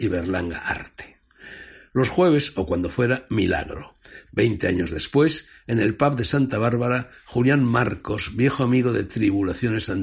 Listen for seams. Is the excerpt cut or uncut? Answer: cut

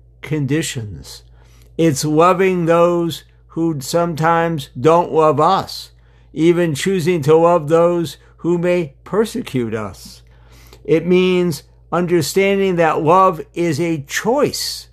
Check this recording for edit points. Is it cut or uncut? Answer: uncut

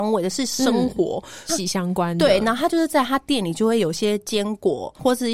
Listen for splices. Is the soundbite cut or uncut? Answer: cut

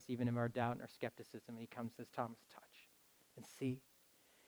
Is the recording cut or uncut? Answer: uncut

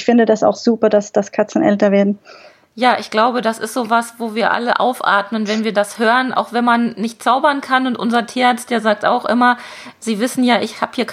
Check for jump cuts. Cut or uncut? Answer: uncut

